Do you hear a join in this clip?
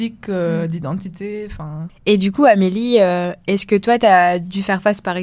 no; 0 cuts

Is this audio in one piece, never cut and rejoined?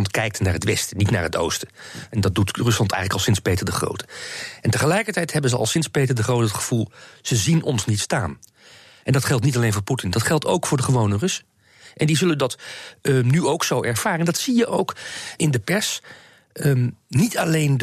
no; 1 cut; at 15.4 s

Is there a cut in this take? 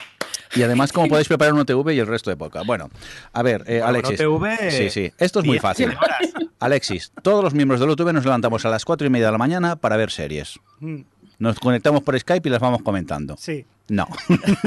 no; 0 cuts

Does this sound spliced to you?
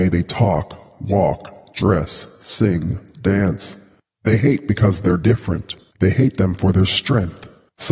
no; 0 cuts

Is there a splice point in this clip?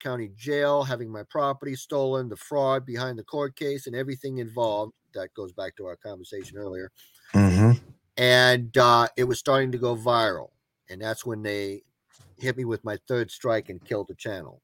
no; 0 cuts

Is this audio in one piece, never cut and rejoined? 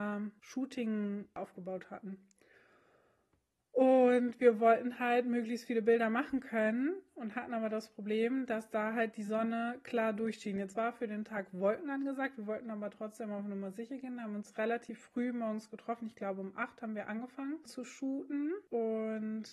yes; 0 cuts

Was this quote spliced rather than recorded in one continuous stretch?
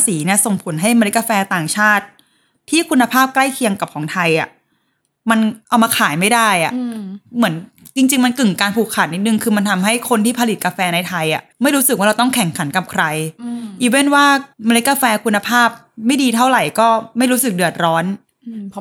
yes; 2 cuts; at 11.5 s, 14.5 s

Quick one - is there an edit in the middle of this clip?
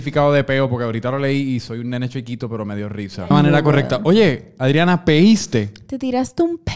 yes; 1 cut; at 3.3 s

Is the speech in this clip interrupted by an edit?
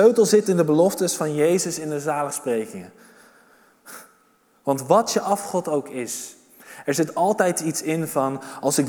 no; 0 cuts

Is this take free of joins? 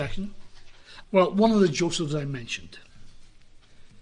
no; 1 cut; at 1.0 s

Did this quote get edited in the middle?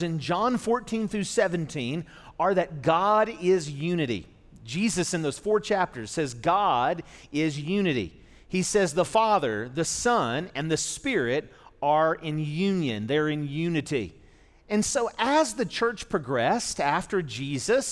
no; 0 cuts

